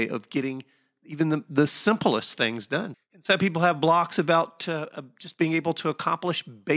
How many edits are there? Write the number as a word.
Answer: one